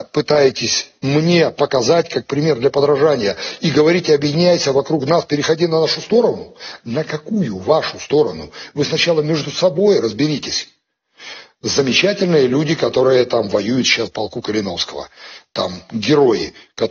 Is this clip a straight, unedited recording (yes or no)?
yes